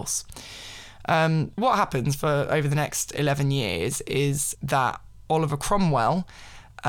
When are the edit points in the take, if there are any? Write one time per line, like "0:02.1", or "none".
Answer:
0:01.6
0:04.5